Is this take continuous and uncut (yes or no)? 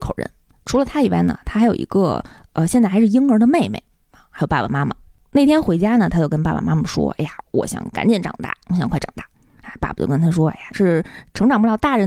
no